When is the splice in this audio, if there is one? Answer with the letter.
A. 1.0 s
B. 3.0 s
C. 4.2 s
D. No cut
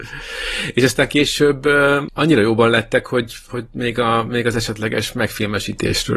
D